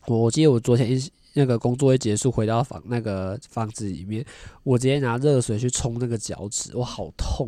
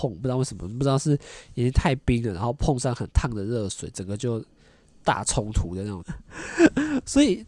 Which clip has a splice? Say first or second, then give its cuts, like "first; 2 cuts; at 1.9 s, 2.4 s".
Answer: second; 1 cut; at 6.0 s